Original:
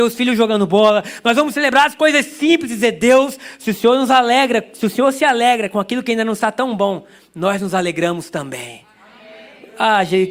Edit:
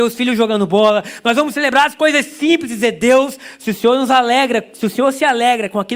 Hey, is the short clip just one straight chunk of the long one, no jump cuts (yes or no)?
yes